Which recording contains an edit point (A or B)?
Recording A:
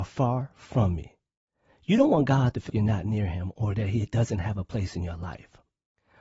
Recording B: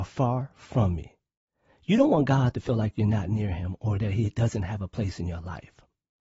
A